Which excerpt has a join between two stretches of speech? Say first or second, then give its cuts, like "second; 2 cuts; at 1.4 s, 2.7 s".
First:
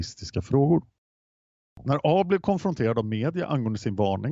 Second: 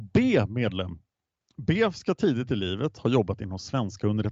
second; 1 cut; at 1.4 s